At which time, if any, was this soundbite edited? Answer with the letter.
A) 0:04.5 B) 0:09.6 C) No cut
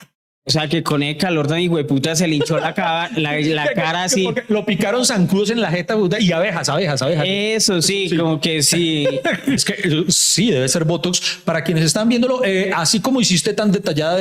B